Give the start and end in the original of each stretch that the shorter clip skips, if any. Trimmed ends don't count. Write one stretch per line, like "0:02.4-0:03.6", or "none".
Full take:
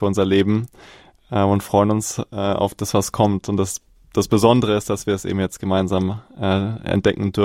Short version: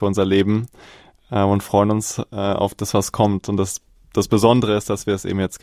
none